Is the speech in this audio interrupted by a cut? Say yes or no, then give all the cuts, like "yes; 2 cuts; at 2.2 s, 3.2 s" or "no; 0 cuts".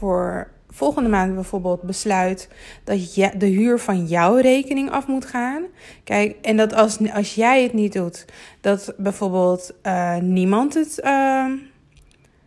no; 0 cuts